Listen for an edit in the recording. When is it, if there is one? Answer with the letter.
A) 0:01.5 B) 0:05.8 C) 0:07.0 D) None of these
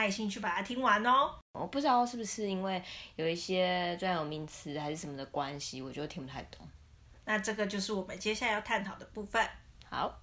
D